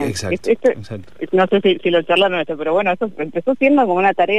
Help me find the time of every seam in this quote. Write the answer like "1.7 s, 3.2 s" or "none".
3.1 s